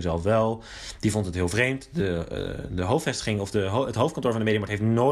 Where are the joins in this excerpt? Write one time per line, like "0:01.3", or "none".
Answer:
none